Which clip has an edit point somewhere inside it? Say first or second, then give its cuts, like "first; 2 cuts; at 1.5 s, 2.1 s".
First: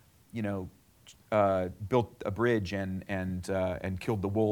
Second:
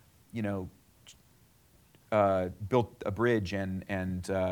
first; 1 cut; at 1.2 s